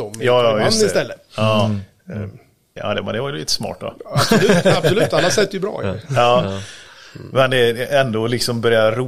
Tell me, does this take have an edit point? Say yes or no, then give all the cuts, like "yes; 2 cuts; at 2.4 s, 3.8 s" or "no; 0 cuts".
yes; 1 cut; at 2.8 s